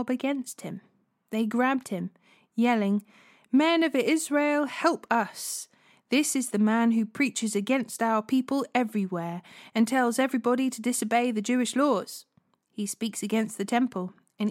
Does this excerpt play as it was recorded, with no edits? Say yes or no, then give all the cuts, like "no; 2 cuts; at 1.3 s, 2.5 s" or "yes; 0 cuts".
yes; 0 cuts